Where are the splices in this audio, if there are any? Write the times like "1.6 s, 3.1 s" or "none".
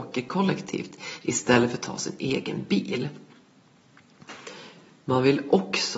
none